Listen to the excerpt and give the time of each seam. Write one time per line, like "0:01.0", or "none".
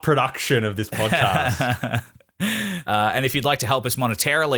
0:02.8